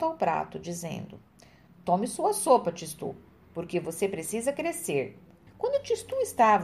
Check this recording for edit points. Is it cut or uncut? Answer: cut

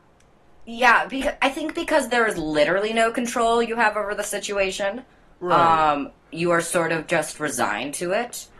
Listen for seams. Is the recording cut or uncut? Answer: uncut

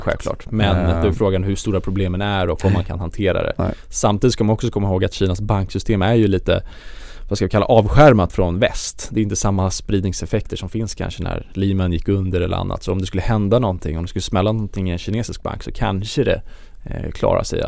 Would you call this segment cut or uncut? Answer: uncut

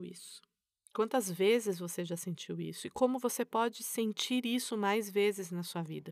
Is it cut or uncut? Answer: uncut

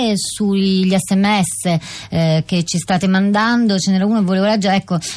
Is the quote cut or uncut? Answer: uncut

